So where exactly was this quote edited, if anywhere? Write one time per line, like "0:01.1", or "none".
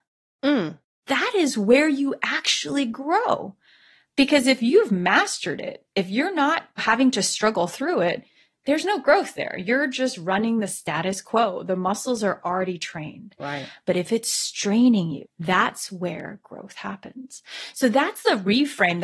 0:15.2